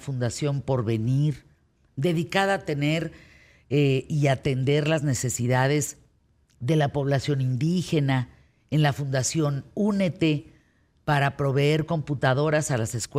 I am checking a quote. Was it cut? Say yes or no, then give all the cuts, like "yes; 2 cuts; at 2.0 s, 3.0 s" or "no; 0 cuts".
no; 0 cuts